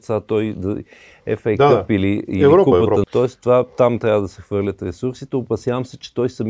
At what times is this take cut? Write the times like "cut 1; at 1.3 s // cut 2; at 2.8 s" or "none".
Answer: cut 1; at 3.0 s